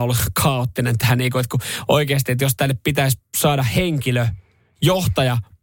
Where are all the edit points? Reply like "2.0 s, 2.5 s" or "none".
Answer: none